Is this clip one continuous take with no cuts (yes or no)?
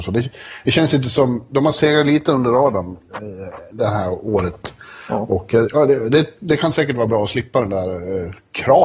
yes